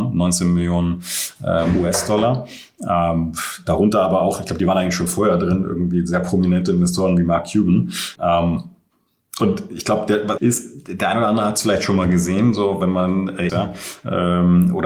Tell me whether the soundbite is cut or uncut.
cut